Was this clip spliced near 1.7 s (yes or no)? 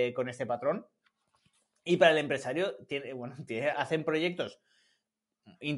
no